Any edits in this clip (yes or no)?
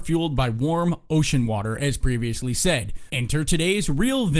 yes